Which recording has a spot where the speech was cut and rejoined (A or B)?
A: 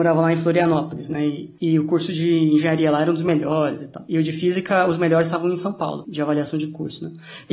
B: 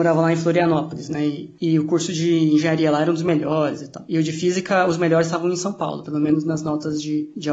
A